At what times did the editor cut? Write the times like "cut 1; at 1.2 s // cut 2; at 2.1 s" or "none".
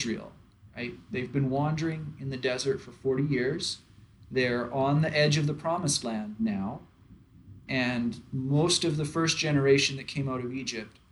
none